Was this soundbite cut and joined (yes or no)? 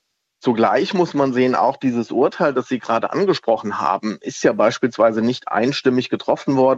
no